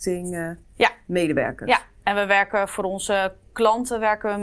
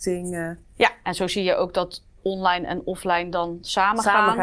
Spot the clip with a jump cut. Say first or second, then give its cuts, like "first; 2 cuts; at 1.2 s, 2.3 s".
second; 1 cut; at 1.0 s